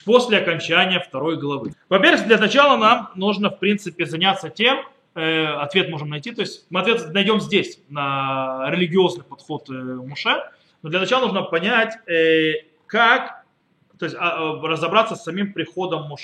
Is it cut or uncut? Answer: cut